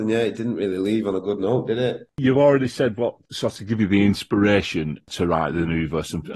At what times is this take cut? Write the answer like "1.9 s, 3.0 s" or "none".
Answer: 2.1 s